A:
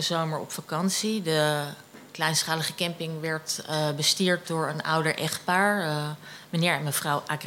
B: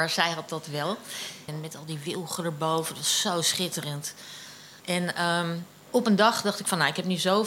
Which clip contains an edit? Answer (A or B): B